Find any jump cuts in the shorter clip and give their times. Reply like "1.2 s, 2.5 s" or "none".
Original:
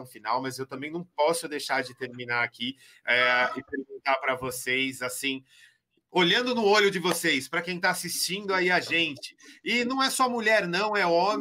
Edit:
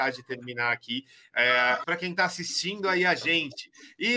1.8 s

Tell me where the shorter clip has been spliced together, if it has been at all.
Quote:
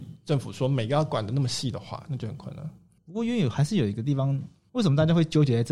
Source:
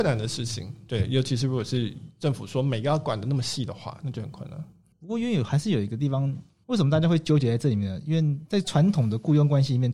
none

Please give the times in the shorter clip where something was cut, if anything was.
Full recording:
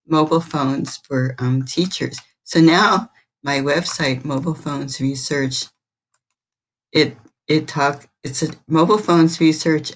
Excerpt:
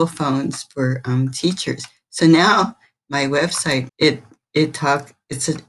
3.9 s

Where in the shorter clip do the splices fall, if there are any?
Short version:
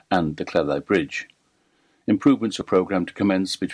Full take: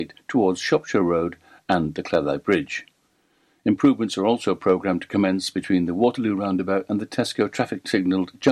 2.6 s

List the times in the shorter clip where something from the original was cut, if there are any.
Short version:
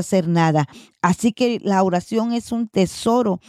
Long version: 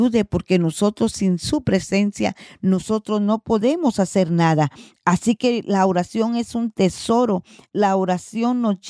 none

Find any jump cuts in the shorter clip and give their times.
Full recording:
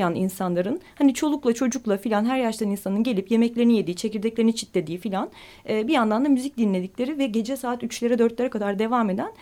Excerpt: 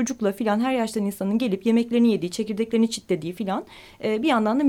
none

